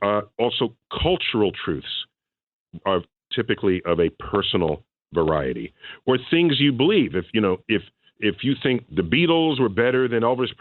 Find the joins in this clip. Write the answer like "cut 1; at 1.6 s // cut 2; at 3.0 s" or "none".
cut 1; at 2.8 s // cut 2; at 7.6 s